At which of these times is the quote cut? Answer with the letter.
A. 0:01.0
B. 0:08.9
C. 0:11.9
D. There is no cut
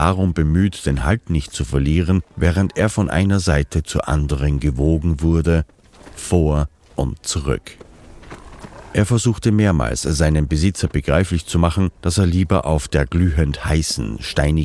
D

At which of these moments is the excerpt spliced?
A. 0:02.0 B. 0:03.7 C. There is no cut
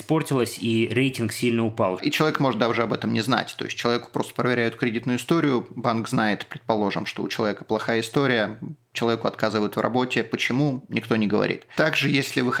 A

